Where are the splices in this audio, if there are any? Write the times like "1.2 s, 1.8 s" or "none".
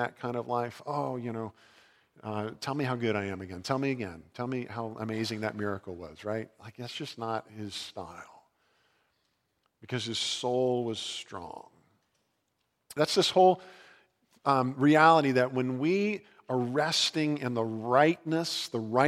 13.0 s